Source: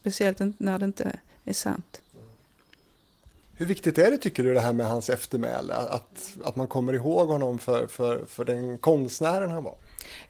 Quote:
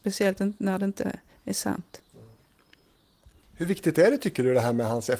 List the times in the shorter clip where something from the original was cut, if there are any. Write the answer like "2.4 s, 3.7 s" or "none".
none